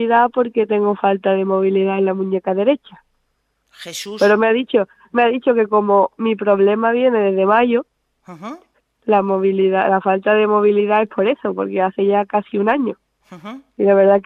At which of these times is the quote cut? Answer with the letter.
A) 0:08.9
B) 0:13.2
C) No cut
B